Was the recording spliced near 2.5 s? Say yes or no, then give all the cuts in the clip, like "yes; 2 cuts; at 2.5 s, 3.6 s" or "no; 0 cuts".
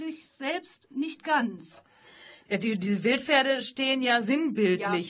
yes; 1 cut; at 2.5 s